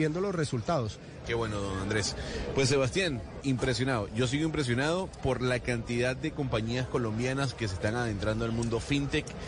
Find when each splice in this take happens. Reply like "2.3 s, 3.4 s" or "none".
1.2 s, 3.4 s